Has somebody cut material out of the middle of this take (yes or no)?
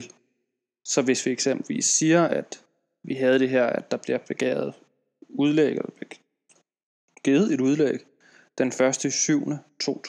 no